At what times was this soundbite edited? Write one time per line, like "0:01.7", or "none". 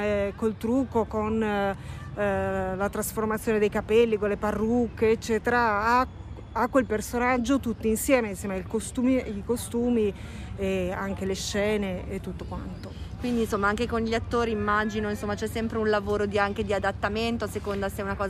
none